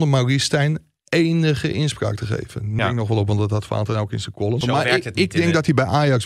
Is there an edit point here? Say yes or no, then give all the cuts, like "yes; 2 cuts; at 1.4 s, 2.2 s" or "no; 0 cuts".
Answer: yes; 2 cuts; at 2.8 s, 4.6 s